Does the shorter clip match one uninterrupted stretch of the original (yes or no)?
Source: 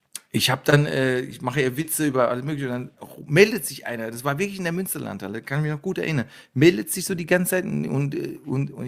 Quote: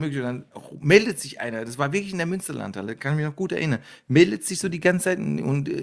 yes